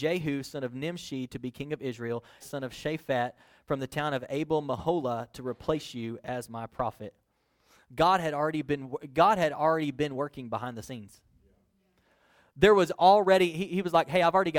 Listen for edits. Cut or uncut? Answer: cut